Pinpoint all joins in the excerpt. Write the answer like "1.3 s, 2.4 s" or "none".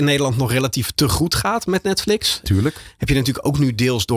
2.4 s